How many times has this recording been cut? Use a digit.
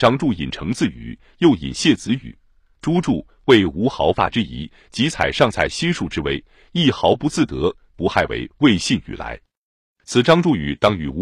0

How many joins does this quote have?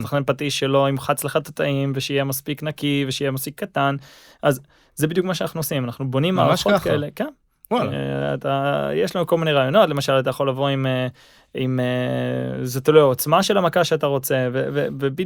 0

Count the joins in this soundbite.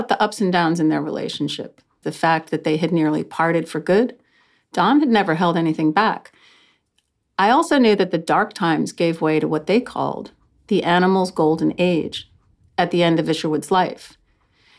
1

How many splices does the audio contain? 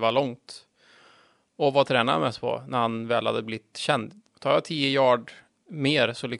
1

